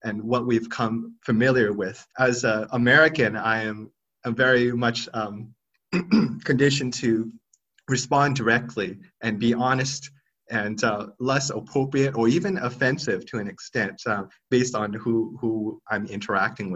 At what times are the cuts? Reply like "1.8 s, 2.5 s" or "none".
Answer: 2.1 s, 11.1 s